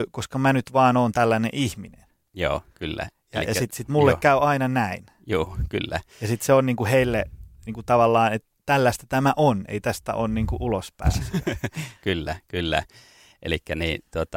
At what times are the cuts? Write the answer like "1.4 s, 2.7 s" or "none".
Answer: none